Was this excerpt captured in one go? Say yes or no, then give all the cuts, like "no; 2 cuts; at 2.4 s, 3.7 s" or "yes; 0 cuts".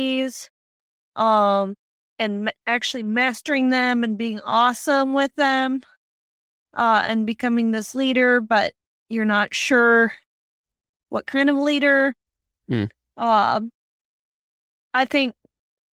yes; 0 cuts